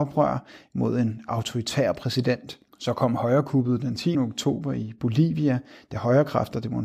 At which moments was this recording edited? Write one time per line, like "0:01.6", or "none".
0:02.7
0:04.1